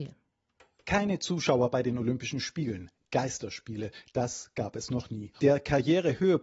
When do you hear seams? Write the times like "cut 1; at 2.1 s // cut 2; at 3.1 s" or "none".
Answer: cut 1; at 5.4 s